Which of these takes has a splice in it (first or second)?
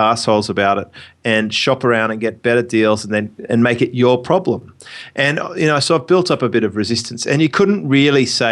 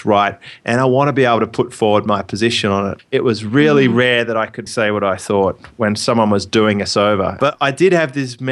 second